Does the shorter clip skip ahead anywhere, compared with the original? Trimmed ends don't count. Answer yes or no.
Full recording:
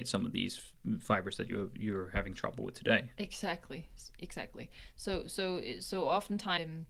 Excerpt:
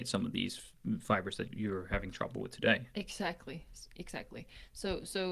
yes